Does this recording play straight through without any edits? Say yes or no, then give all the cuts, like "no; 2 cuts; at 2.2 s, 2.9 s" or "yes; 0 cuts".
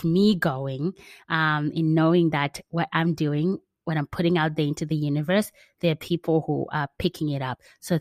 yes; 0 cuts